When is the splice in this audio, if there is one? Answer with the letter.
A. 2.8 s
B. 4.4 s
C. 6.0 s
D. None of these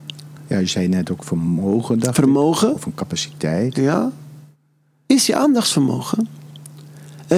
D